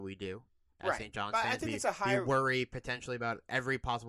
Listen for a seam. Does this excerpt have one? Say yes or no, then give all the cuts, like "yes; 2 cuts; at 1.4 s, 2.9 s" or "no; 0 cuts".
no; 0 cuts